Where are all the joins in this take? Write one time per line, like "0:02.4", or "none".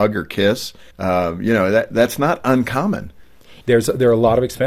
0:00.9
0:03.6